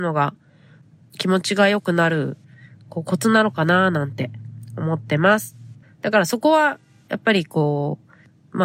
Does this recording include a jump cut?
yes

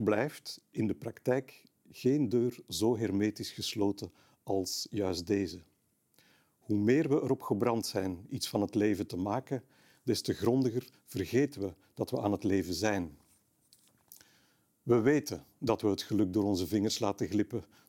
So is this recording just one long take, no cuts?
yes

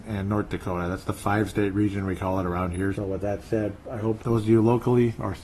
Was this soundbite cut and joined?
yes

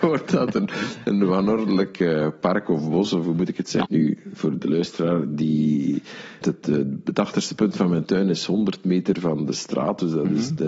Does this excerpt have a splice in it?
yes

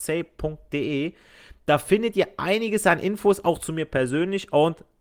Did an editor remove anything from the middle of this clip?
no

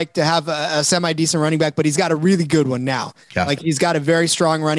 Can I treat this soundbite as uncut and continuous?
yes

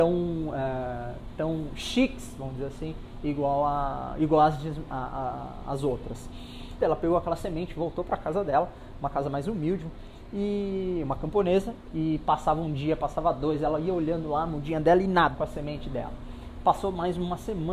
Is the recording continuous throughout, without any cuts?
no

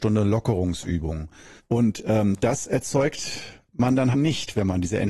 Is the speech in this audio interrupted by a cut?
yes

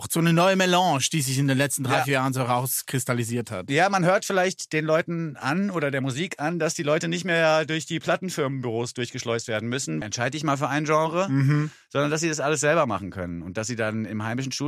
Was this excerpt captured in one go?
no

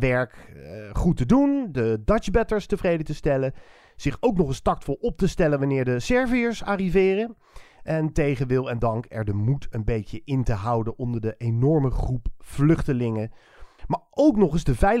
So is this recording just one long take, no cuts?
yes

